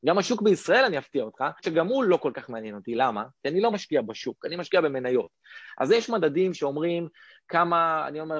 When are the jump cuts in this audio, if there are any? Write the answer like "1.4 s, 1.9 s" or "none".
none